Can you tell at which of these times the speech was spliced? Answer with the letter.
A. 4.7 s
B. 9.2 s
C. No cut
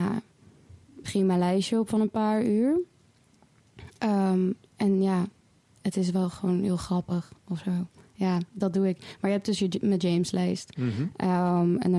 C